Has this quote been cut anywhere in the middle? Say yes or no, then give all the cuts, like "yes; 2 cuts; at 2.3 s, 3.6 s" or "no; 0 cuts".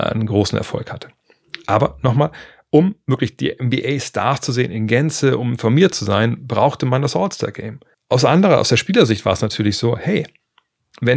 yes; 1 cut; at 7.9 s